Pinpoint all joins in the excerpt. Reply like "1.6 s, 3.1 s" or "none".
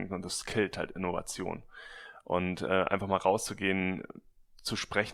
none